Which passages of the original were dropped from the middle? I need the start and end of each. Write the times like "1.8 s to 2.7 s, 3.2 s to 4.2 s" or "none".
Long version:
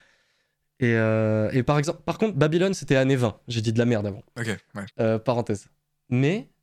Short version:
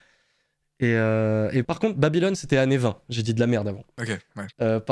1.6 s to 2.0 s